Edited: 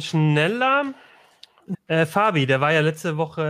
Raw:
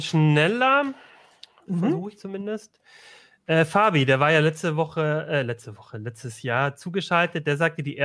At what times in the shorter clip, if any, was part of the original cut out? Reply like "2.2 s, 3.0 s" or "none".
1.7 s